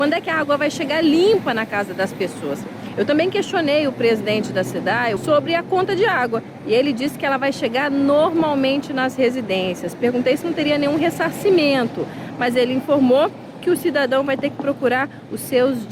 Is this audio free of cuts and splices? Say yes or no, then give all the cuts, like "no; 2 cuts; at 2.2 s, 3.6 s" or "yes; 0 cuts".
no; 1 cut; at 5.2 s